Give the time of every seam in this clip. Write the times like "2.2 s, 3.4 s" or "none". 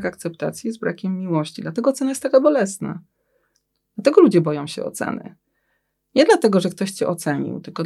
none